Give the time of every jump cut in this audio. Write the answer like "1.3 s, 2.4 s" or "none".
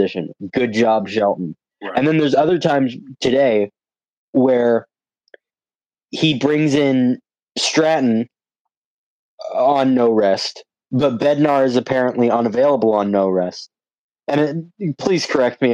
none